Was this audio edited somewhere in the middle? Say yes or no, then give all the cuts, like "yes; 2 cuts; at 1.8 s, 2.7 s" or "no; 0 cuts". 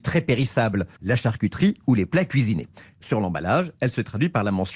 yes; 1 cut; at 1.0 s